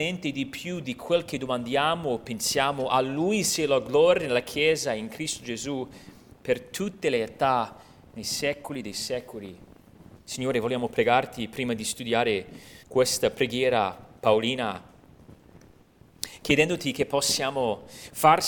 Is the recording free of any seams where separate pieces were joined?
no; 2 cuts; at 10.2 s, 12.8 s

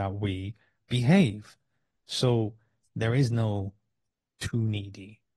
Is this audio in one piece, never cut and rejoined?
yes; 0 cuts

